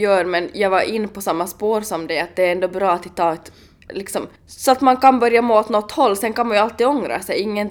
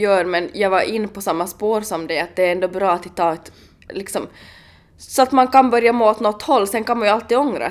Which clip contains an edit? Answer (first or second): first